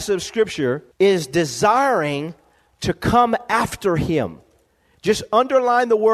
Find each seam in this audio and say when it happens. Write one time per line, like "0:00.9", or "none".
0:00.9